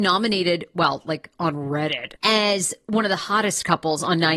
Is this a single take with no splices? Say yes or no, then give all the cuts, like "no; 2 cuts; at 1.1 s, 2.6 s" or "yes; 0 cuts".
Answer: no; 1 cut; at 2.2 s